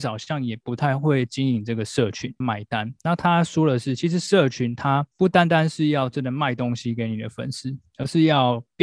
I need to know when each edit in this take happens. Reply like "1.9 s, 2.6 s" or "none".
2.4 s